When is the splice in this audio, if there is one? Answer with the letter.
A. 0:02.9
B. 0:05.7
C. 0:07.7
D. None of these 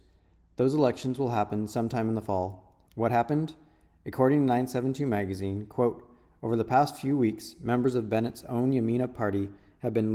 A